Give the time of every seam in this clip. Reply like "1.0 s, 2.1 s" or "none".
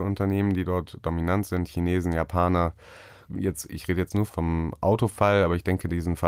3.3 s, 4.3 s